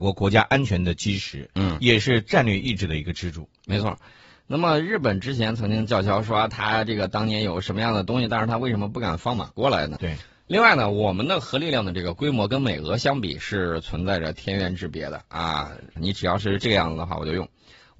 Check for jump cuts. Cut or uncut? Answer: cut